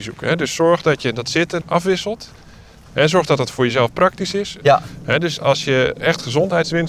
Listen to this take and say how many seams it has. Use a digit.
2